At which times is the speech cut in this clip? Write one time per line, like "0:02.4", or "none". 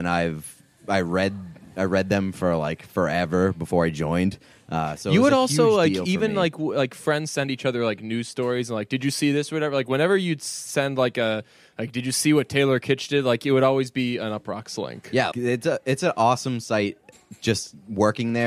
0:15.3